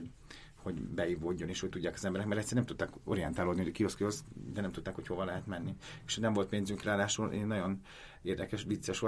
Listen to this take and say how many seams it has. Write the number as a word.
zero